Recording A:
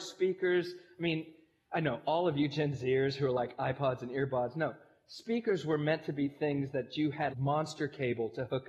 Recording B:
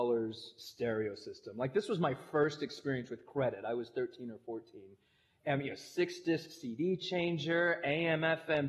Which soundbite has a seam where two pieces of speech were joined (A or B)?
A